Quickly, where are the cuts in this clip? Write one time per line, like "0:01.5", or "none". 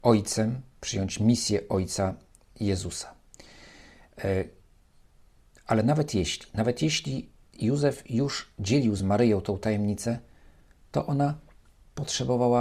none

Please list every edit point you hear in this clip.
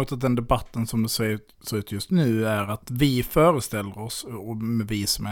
none

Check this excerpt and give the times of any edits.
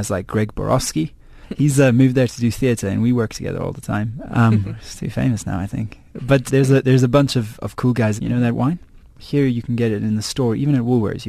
0:04.3
0:06.5
0:08.2

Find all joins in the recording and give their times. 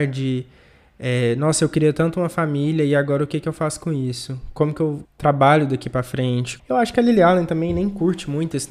0:05.1
0:06.6

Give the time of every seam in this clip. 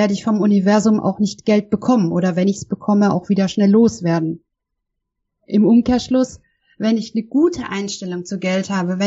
none

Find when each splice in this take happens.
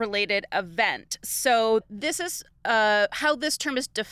none

